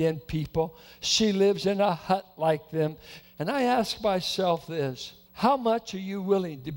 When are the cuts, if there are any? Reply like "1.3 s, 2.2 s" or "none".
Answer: 3.2 s, 5.3 s